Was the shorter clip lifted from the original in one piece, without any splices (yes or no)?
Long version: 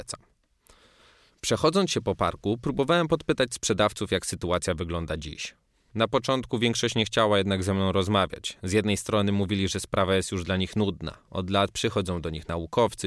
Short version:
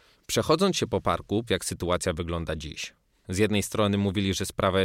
no